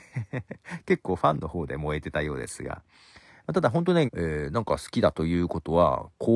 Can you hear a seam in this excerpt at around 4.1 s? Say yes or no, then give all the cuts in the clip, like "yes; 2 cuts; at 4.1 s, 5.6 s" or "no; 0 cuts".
yes; 1 cut; at 4.1 s